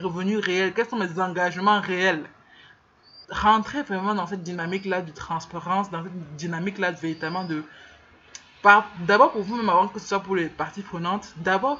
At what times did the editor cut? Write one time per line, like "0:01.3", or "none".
0:03.2